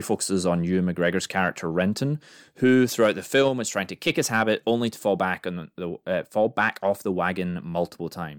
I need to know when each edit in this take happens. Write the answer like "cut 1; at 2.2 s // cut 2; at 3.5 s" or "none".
none

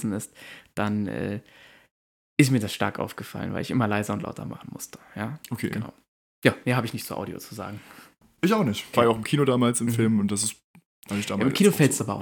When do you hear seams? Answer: cut 1; at 8.9 s

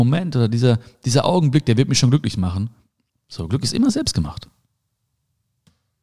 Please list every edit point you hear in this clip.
cut 1; at 3.1 s

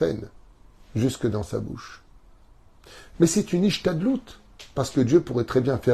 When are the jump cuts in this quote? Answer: cut 1; at 3.1 s

